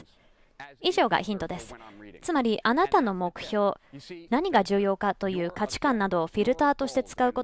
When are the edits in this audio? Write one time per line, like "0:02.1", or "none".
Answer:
0:04.3